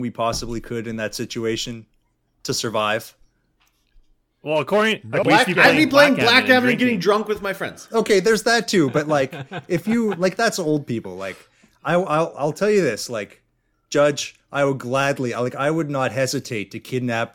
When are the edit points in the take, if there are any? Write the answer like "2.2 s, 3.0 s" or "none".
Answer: 5.2 s

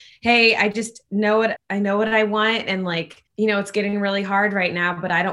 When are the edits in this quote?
1.6 s, 3.3 s

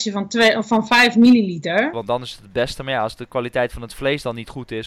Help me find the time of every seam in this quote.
1.9 s

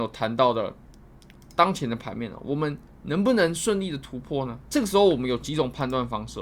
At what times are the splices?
4.7 s

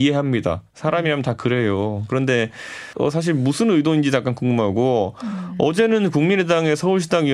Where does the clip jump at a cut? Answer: none

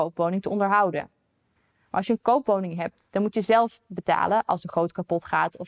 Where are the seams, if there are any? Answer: 1.7 s

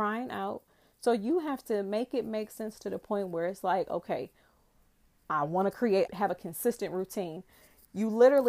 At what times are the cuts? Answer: 6.1 s

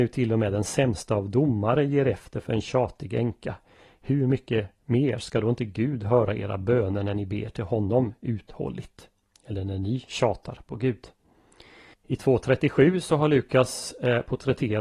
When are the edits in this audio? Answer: 11.9 s

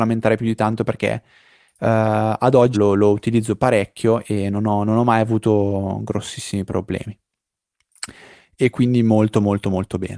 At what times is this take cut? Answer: 2.7 s

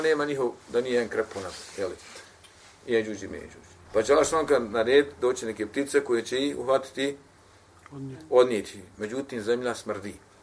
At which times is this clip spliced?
3.8 s, 8.9 s

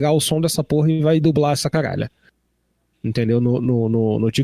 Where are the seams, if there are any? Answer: none

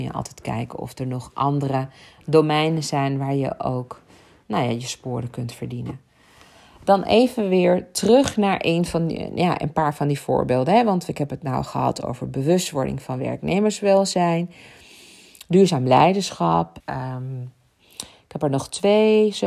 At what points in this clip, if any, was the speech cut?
16.8 s

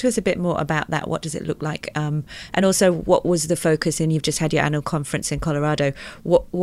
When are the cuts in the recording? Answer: none

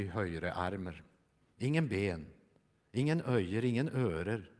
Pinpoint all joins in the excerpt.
none

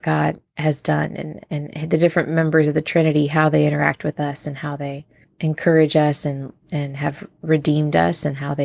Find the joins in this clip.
none

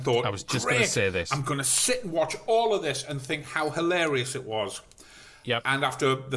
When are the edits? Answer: none

